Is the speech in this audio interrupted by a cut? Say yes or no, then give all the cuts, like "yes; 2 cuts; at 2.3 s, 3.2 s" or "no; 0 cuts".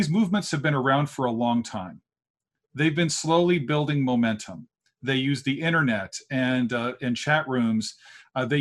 no; 0 cuts